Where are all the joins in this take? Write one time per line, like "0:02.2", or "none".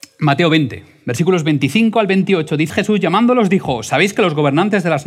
0:02.7